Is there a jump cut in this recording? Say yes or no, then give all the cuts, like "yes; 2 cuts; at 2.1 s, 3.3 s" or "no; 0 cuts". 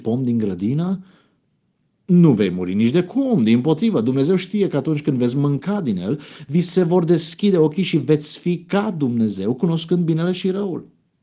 no; 0 cuts